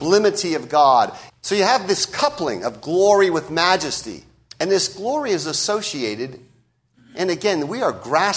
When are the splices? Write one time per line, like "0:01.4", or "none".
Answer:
0:01.3
0:04.5